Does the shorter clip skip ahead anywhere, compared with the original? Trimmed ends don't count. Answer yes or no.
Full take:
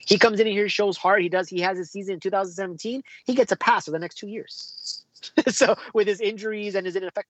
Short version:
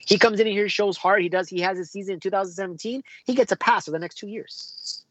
no